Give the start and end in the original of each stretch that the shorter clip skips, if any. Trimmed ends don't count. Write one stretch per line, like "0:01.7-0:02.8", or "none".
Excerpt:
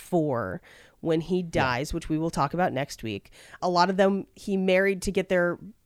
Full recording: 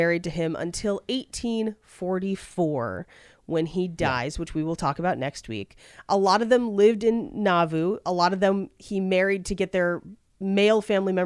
0:06.0-0:08.0